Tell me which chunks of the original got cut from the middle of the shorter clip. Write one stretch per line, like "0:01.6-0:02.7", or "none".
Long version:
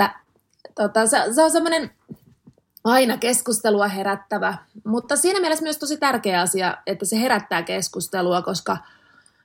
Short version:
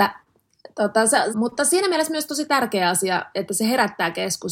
0:01.3-0:04.8